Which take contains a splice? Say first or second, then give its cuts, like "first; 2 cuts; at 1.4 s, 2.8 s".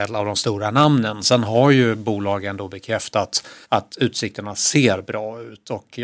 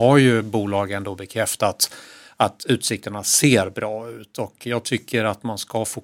first; 1 cut; at 3.6 s